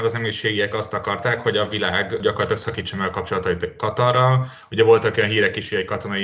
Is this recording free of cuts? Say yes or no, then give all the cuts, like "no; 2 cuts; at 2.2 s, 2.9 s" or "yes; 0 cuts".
yes; 0 cuts